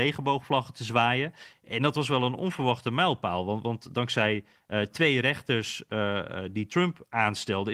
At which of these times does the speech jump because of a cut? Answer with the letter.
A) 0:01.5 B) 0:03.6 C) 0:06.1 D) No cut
A